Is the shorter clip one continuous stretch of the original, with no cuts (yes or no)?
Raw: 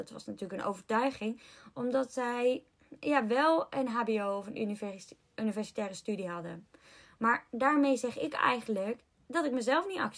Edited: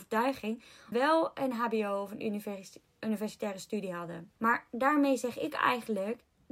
no